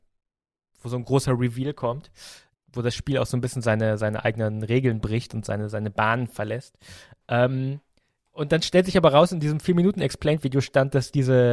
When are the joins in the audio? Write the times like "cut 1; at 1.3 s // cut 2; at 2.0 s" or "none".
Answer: cut 1; at 7.2 s

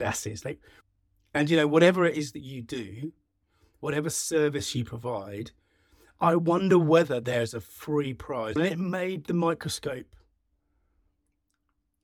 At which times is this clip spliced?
cut 1; at 8.6 s

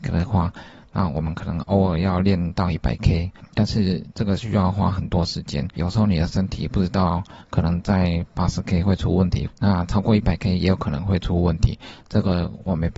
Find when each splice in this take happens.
cut 1; at 5.8 s // cut 2; at 9.5 s

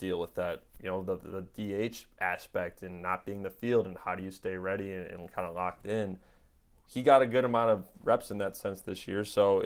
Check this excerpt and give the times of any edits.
none

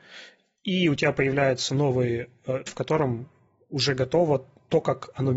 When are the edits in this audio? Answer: cut 1; at 2.7 s

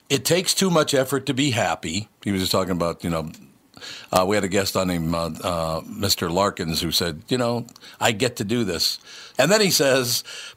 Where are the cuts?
cut 1; at 7.2 s // cut 2; at 9.3 s

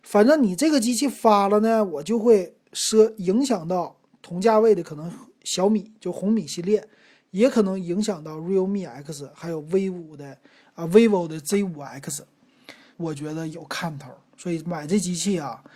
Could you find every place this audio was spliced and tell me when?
cut 1; at 12.9 s

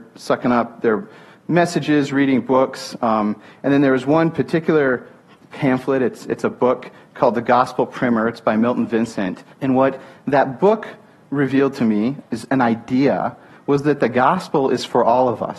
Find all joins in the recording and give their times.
cut 1; at 9.5 s // cut 2; at 12.2 s

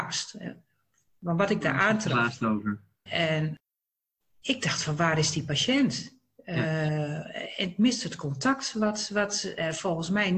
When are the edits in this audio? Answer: cut 1; at 3.1 s

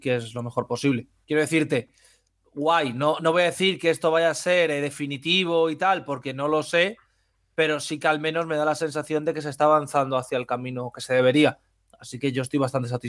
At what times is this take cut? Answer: none

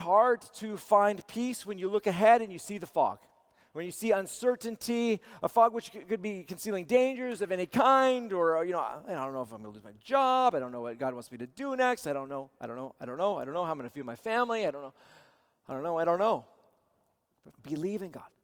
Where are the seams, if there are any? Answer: cut 1; at 17.5 s

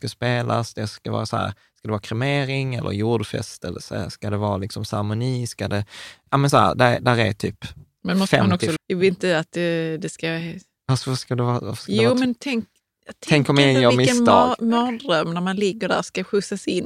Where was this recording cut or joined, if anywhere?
cut 1; at 8.8 s

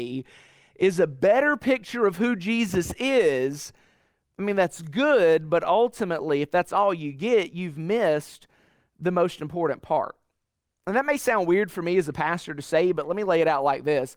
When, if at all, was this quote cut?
none

